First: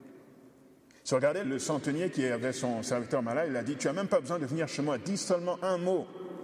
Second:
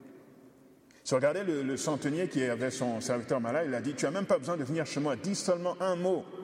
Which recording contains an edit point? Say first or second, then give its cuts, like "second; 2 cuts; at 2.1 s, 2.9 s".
first; 1 cut; at 1.4 s